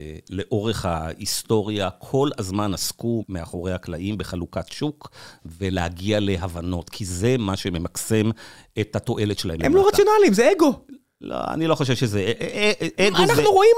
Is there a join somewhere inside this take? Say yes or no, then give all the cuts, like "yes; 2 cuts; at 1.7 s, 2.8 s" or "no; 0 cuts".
yes; 2 cuts; at 3.2 s, 9.6 s